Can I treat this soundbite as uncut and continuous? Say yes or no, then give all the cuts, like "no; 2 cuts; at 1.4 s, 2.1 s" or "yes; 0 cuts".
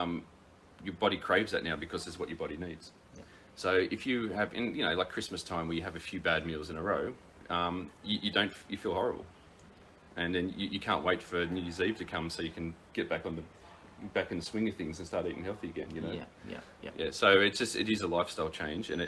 yes; 0 cuts